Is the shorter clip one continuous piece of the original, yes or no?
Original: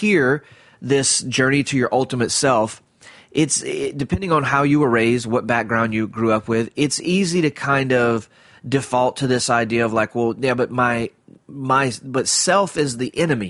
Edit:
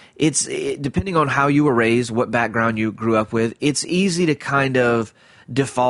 yes